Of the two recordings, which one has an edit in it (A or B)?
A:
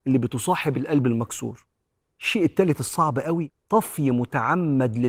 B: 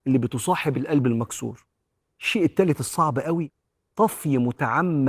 A